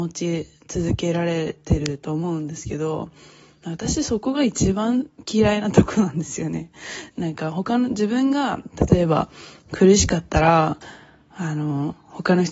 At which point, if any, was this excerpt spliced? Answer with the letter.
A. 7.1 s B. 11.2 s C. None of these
A